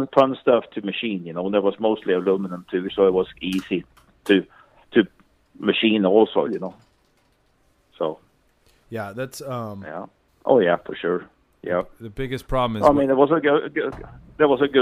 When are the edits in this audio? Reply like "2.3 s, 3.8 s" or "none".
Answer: 6.5 s, 10.3 s